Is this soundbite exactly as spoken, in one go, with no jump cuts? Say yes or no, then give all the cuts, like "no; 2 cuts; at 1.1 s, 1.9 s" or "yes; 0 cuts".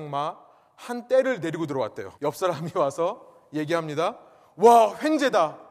no; 1 cut; at 2.1 s